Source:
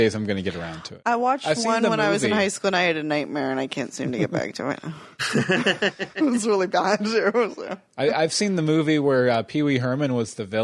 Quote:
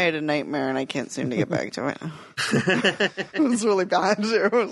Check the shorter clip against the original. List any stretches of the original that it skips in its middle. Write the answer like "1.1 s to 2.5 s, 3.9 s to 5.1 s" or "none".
none